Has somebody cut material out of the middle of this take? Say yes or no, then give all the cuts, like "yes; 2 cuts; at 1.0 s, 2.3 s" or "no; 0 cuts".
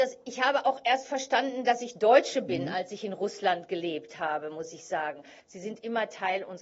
yes; 1 cut; at 5.4 s